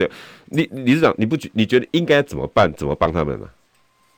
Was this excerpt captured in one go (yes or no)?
no